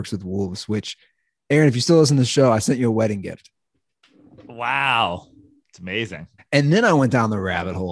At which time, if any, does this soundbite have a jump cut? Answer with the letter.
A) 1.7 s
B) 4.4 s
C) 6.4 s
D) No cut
C